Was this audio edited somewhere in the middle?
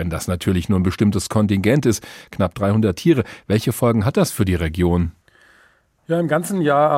no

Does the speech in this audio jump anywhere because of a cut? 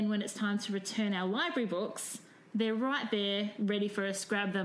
no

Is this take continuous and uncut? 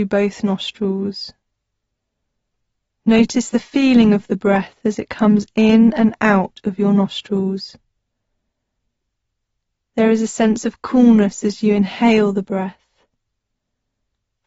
yes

